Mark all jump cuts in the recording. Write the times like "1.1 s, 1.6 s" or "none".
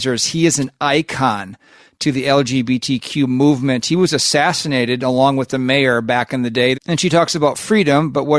6.7 s